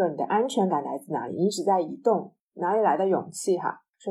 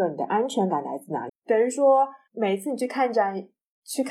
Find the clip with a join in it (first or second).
second